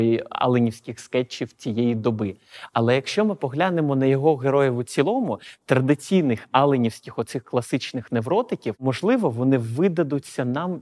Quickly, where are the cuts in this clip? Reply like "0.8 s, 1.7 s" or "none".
none